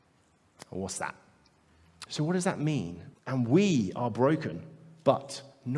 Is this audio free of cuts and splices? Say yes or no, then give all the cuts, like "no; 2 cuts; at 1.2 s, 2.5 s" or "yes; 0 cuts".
no; 2 cuts; at 2.1 s, 3.1 s